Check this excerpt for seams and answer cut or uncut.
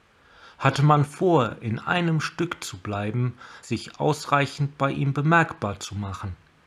cut